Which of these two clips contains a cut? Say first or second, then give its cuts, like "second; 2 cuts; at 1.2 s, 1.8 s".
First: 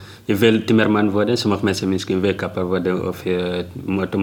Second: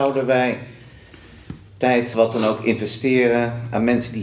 second; 1 cut; at 2.1 s